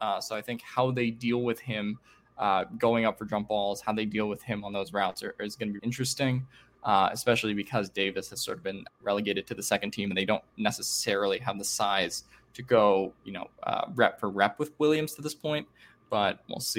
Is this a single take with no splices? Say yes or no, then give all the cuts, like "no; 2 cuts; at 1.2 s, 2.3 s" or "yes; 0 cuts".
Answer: no; 2 cuts; at 5.8 s, 9.0 s